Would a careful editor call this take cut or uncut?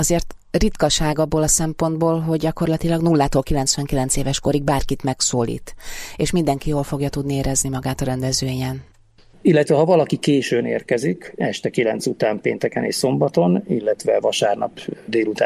cut